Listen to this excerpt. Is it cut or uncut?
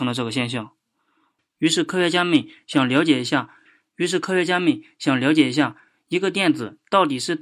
cut